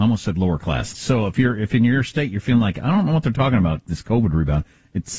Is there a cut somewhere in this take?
yes; 1 cut; at 0.9 s

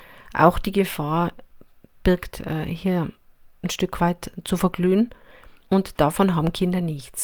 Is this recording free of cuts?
yes; 0 cuts

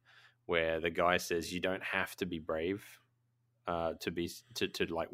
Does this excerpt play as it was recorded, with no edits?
yes; 0 cuts

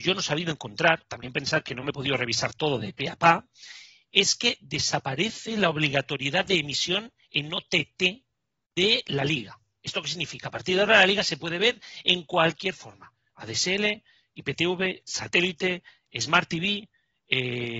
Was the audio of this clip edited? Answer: no; 0 cuts

